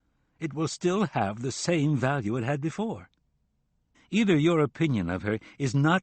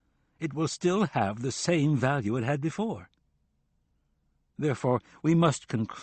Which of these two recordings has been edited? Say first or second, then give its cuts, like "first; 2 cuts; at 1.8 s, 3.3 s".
first; 1 cut; at 3.9 s